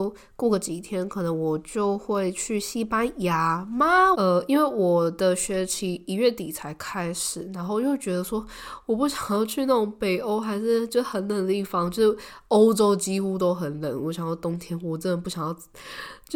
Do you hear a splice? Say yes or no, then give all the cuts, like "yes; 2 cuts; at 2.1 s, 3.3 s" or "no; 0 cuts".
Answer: yes; 1 cut; at 4.1 s